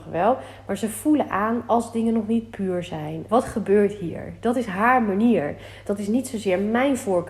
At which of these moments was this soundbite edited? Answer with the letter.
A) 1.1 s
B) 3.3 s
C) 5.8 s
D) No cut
B